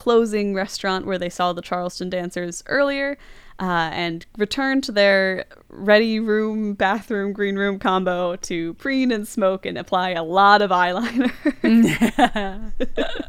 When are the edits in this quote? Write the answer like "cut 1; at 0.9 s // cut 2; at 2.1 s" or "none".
none